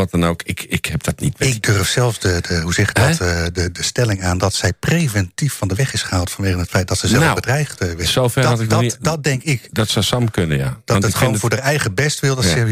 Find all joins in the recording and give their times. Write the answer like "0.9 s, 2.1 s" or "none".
none